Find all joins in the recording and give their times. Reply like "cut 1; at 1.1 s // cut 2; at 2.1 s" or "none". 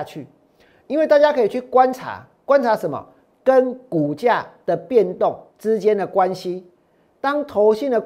cut 1; at 3.3 s // cut 2; at 5.5 s